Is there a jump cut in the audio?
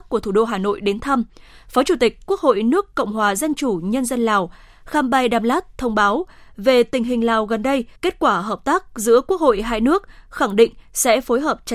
yes; 1 cut; at 7.9 s

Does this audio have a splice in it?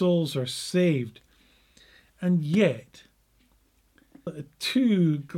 yes; 1 cut; at 4.3 s

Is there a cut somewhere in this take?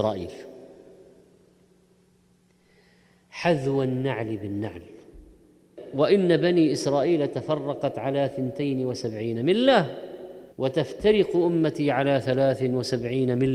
yes; 1 cut; at 10.5 s

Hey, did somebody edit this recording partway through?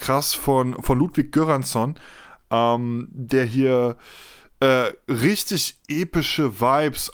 no; 0 cuts

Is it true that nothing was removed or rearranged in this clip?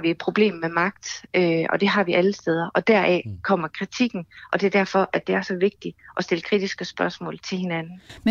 yes; 0 cuts

